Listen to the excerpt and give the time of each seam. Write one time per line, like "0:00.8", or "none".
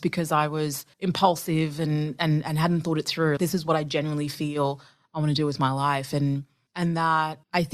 0:00.9
0:03.4